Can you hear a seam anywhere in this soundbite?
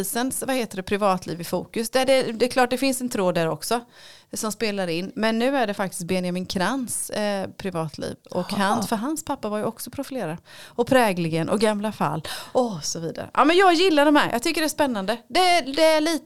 yes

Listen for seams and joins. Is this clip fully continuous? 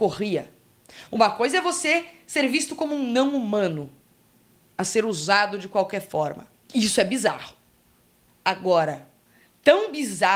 yes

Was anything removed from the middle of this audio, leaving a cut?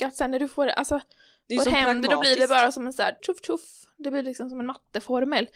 yes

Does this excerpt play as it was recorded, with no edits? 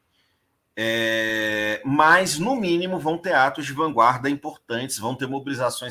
yes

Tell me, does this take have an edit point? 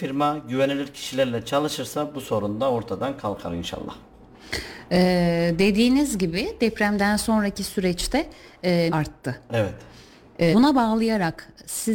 yes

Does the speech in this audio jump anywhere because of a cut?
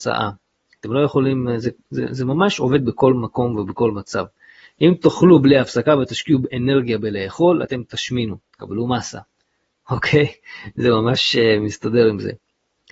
no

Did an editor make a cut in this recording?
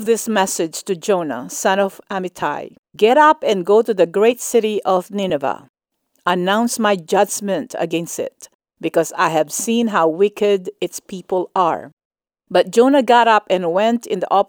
yes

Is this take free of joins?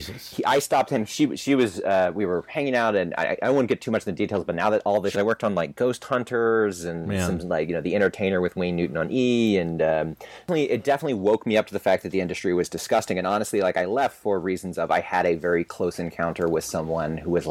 no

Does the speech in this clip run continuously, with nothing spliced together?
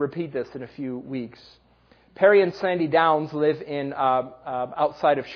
yes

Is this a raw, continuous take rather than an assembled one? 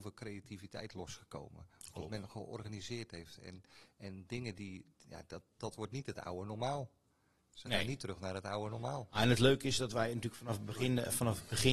no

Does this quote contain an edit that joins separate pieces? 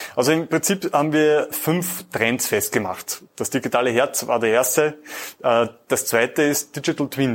no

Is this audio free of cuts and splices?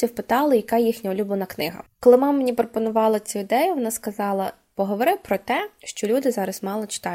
no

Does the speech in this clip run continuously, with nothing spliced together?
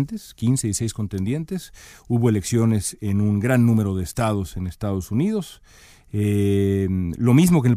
yes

